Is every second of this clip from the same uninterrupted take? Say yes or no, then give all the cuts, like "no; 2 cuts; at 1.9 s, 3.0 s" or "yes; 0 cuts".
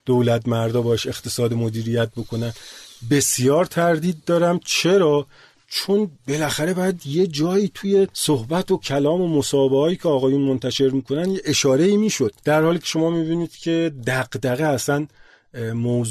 no; 1 cut; at 12.4 s